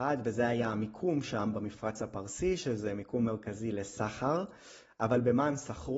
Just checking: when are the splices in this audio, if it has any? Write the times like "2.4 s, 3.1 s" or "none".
none